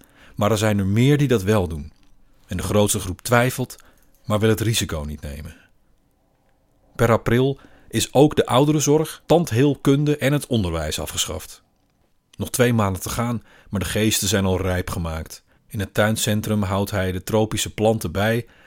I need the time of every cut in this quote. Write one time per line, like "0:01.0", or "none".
0:09.2
0:15.6